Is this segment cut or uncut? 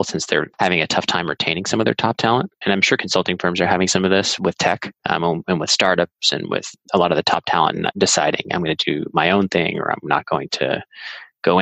cut